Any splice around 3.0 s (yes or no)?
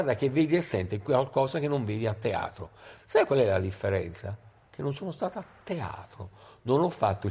yes